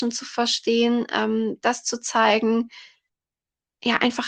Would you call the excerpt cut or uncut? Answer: uncut